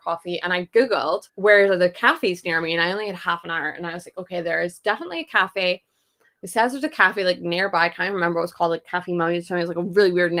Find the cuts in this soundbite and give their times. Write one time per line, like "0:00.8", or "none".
0:01.3